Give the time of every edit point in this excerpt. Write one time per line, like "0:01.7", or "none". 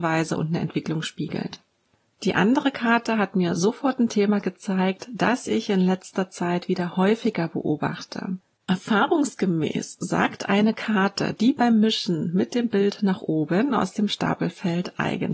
0:08.6